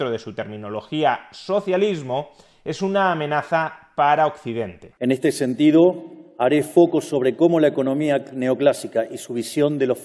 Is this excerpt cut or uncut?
cut